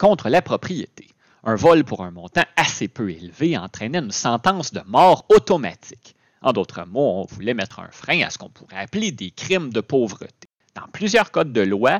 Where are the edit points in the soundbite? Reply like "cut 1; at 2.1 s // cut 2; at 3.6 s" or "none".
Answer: cut 1; at 10.6 s